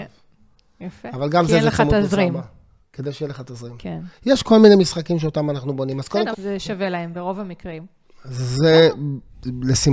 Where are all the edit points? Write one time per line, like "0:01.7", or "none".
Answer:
0:06.3